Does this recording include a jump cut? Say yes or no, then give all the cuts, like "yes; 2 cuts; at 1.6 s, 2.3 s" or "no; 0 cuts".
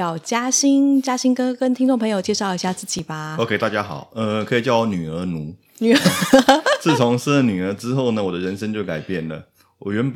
no; 0 cuts